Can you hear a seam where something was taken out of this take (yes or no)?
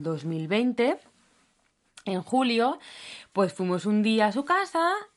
no